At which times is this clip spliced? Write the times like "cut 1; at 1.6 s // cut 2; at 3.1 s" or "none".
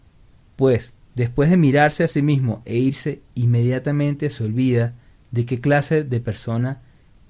none